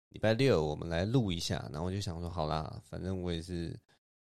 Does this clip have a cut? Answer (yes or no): no